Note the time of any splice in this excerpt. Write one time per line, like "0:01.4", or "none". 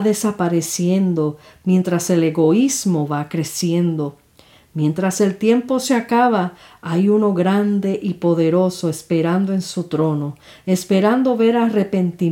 none